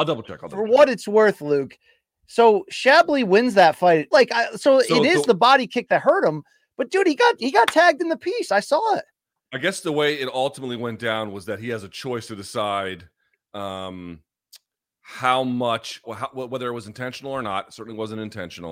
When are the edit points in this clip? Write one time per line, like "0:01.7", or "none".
0:04.1
0:16.0